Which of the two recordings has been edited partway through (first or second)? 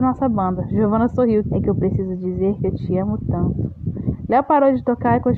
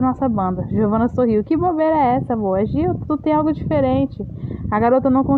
first